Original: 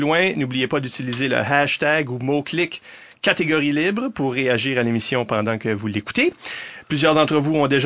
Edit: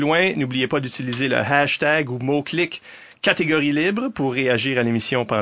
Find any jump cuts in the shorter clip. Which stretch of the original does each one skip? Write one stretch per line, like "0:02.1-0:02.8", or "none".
none